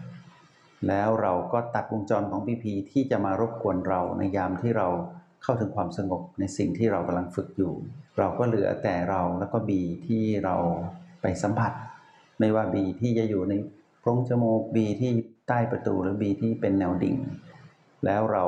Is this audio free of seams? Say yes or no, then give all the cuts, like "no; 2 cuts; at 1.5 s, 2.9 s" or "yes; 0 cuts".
no; 1 cut; at 8.1 s